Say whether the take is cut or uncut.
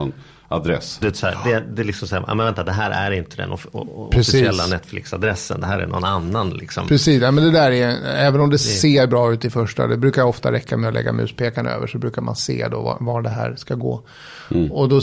cut